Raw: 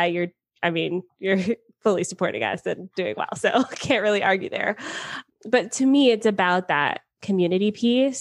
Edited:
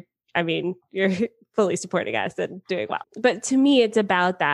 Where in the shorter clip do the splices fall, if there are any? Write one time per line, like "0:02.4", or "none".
0:03.0

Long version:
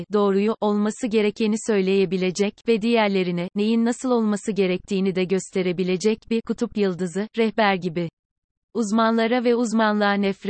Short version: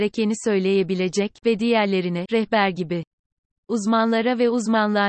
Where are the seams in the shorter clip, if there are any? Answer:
0:02.3

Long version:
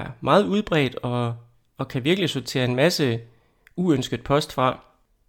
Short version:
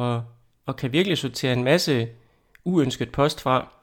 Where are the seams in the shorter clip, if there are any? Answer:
none

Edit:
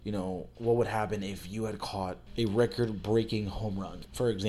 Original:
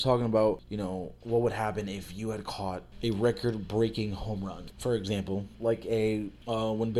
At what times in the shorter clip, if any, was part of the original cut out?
none

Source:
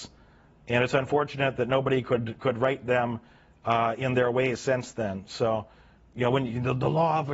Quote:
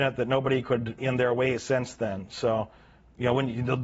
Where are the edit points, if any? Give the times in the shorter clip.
0:01.0

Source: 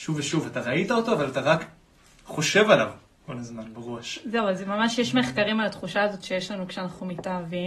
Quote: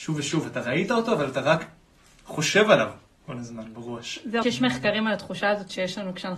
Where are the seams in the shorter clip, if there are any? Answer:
0:04.4

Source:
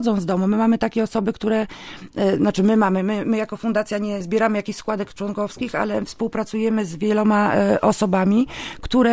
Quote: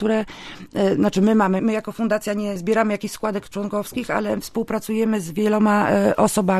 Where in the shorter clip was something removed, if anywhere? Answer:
0:01.6

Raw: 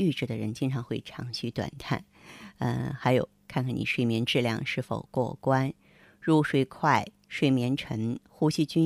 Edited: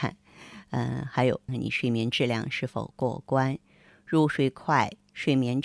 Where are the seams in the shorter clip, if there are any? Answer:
0:01.5

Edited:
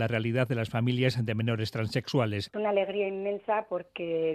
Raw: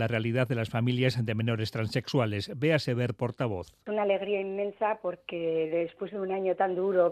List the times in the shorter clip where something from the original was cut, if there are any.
0:02.5

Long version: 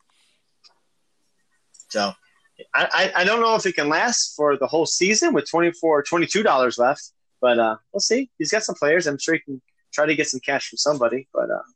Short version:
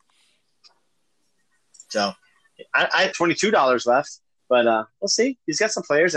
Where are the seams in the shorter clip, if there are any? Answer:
0:03.1

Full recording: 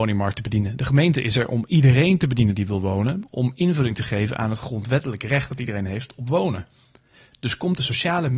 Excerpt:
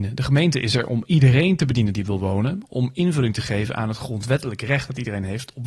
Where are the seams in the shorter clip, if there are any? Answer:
none

